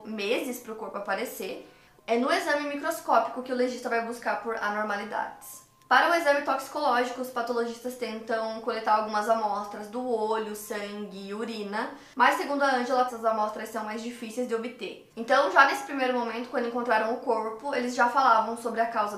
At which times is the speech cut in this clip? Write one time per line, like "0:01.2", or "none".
0:02.0
0:13.1
0:15.1